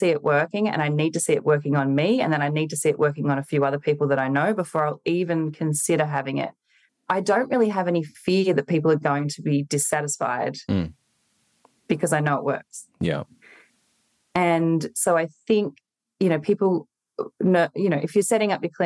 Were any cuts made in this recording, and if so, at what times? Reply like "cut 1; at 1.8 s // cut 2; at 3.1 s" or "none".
cut 1; at 6.9 s